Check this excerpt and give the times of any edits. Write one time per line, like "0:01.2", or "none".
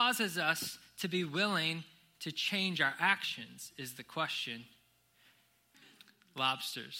0:05.7